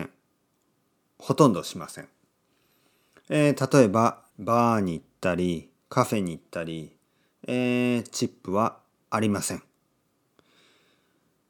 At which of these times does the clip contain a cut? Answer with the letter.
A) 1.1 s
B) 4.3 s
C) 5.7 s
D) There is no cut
B